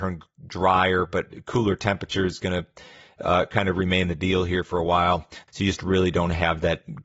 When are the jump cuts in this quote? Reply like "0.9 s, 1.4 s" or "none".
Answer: 5.5 s

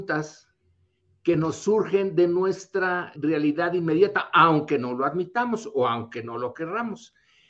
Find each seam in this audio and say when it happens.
3.1 s

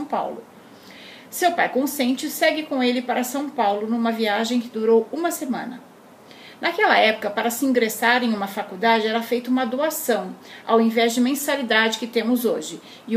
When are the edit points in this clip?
none

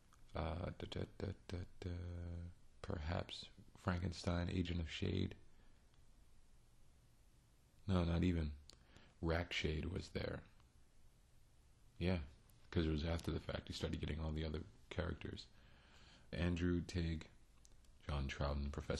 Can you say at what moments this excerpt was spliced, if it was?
11.9 s, 16.3 s, 18.0 s

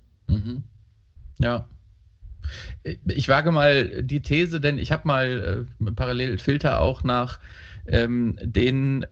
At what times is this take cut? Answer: 6.4 s

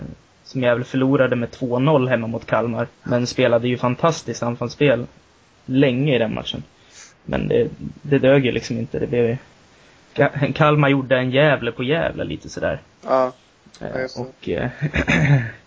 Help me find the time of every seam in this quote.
2.9 s

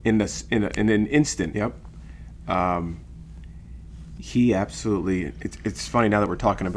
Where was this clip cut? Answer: 1.5 s

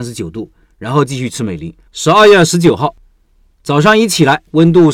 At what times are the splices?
1.9 s

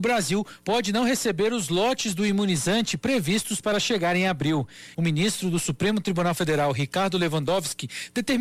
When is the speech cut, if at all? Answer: 4.9 s

